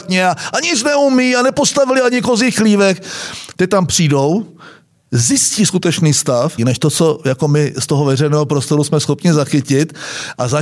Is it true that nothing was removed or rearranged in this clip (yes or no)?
no